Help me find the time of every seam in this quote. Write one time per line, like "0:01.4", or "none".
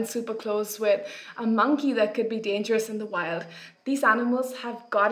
none